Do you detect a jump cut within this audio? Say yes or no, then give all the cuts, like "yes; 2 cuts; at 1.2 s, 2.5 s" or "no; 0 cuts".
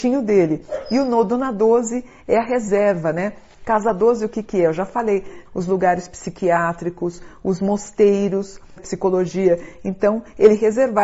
yes; 2 cuts; at 5.4 s, 8.8 s